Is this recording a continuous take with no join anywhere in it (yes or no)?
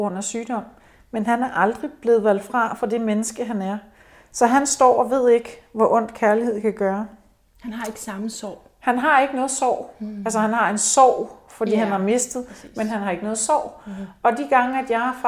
yes